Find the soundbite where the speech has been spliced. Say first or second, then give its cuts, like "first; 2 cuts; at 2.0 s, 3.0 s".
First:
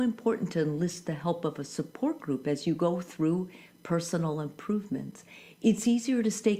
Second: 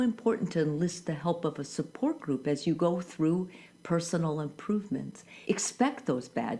second; 1 cut; at 5.5 s